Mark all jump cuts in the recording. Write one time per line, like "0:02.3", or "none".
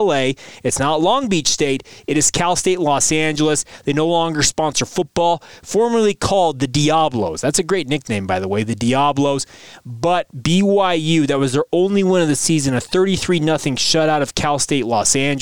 none